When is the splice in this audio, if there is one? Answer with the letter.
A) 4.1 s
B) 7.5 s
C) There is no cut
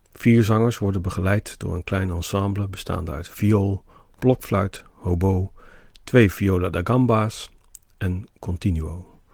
C